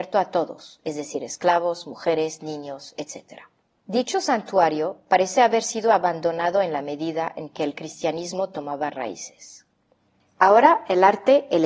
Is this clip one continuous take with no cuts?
yes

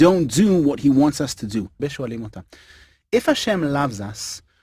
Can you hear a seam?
yes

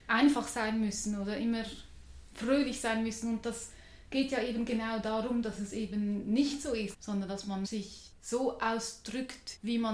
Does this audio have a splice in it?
yes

